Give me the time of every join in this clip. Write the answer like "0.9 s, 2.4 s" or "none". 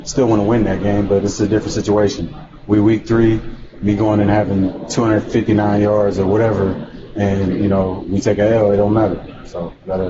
none